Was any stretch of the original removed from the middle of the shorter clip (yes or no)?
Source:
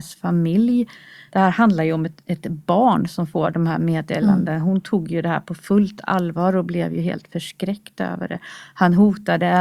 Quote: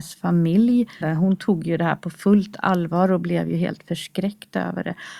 yes